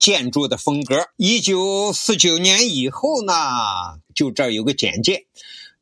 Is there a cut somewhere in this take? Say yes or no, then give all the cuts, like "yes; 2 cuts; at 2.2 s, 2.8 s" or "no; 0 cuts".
yes; 2 cuts; at 1.1 s, 4.1 s